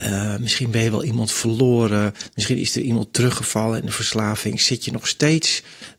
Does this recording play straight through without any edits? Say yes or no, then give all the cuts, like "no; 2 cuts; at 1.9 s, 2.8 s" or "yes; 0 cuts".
yes; 0 cuts